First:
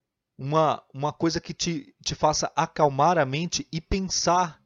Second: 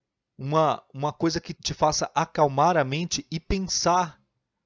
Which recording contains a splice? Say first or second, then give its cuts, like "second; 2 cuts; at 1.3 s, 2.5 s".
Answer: second; 1 cut; at 1.5 s